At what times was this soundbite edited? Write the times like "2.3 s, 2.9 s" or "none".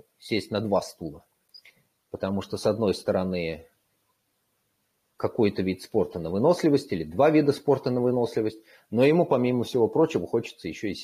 none